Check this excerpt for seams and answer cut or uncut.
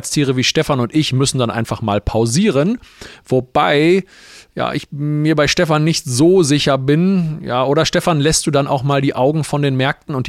uncut